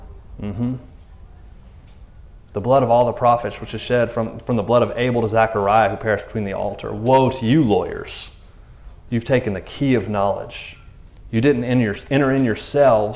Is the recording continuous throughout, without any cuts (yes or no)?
yes